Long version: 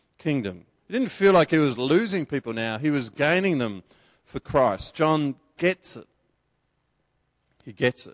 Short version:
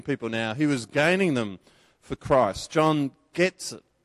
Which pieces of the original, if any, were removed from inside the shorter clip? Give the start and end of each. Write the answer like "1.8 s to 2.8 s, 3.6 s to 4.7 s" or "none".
none